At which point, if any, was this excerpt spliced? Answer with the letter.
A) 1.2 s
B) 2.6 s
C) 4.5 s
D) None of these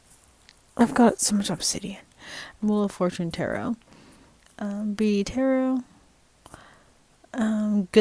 B